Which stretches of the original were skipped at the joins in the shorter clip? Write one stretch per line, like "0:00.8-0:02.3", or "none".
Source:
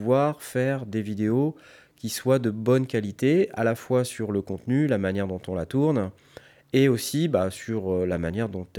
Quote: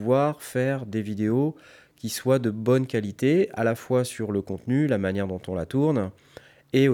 none